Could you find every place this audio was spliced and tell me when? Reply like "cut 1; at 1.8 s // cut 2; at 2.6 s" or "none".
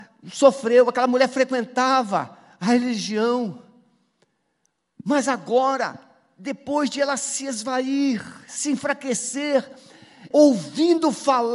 cut 1; at 10.3 s